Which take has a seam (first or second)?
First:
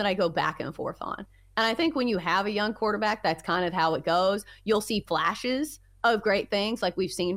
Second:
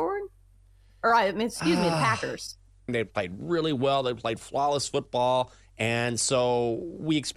second